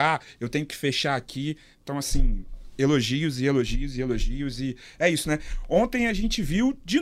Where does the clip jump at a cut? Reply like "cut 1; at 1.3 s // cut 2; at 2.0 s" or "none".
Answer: none